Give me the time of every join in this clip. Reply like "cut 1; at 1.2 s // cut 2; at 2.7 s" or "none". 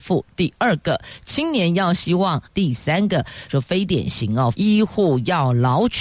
cut 1; at 2.4 s // cut 2; at 3.5 s // cut 3; at 4.5 s